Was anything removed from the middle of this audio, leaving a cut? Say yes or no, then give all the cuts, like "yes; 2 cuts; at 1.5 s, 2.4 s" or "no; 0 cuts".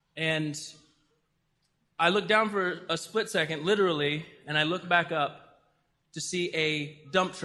no; 0 cuts